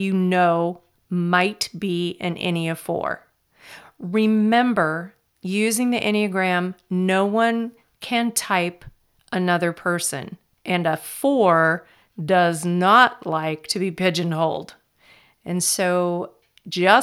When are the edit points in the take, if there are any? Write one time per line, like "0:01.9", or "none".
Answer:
0:10.5